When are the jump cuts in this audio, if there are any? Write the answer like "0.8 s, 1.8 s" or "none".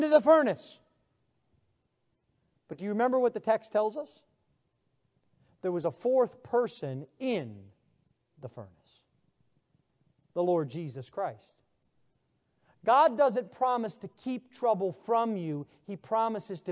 none